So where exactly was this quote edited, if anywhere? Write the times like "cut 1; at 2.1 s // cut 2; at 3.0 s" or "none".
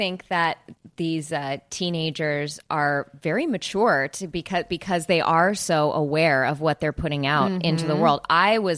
none

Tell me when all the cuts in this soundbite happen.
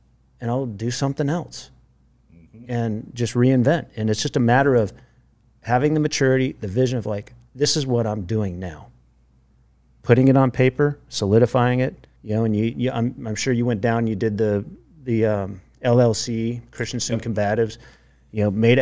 cut 1; at 12.2 s

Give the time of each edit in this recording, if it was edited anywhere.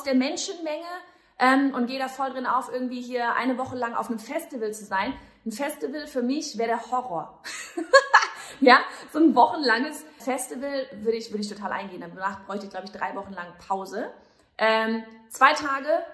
cut 1; at 10.2 s

